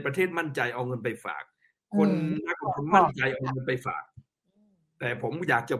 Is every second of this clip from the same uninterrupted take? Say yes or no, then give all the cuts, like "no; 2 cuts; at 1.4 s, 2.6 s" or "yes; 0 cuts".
yes; 0 cuts